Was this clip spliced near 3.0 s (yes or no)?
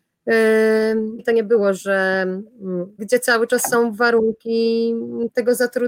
yes